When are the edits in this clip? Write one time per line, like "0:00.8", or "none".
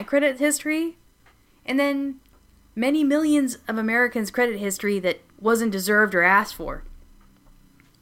0:01.5
0:05.3